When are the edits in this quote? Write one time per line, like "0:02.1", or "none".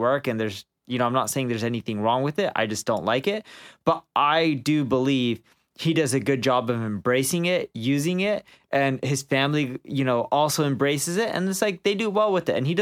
none